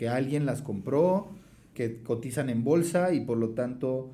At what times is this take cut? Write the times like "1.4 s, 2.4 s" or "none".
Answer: 1.8 s